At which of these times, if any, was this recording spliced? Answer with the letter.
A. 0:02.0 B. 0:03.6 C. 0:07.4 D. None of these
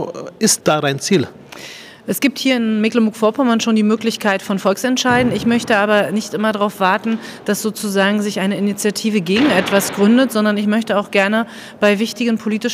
D